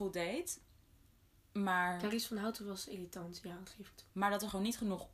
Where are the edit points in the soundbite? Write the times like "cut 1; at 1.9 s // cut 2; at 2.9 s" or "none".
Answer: cut 1; at 4.1 s